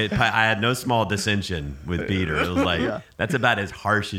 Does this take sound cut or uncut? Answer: uncut